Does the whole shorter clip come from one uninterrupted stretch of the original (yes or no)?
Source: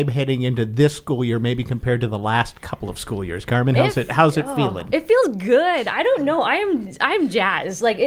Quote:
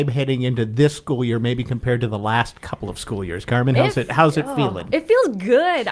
yes